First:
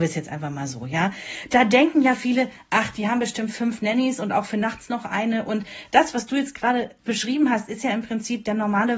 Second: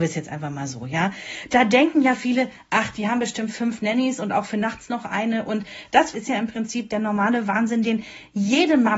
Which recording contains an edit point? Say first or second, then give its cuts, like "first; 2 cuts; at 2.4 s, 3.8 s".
second; 1 cut; at 6.1 s